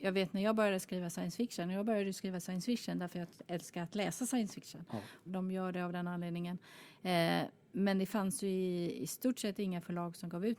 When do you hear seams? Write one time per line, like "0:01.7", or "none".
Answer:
0:05.2

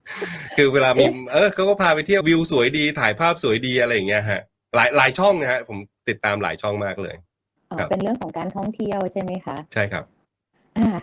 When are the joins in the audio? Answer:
0:02.2
0:09.7

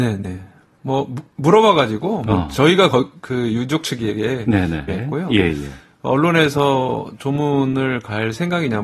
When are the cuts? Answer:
0:04.9

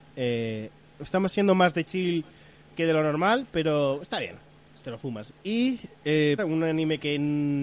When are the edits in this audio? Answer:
0:05.3
0:06.4

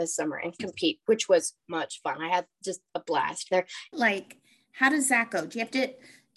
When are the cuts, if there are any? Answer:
0:01.6
0:03.9

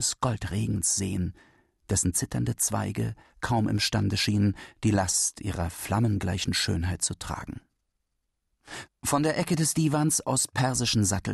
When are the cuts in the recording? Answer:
0:08.9

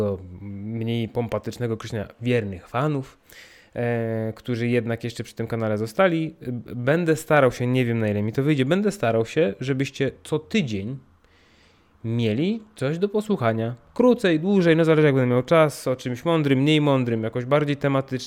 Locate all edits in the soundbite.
none

